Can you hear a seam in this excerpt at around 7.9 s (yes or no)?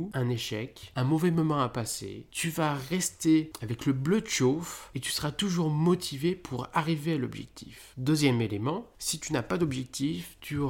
yes